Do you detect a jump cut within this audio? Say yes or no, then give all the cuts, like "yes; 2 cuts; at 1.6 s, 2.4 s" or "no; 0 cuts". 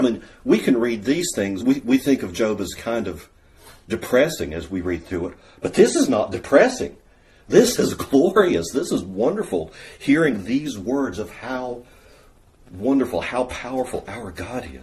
no; 0 cuts